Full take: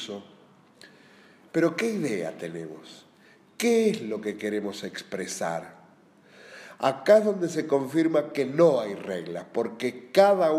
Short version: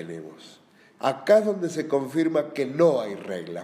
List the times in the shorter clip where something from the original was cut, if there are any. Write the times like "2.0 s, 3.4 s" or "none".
1.0 s